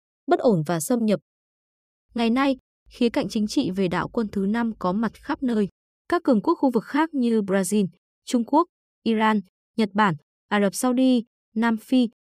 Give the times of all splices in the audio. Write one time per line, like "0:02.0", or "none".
0:05.9
0:08.9